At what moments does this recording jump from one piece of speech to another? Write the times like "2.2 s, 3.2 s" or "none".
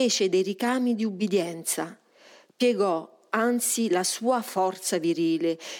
none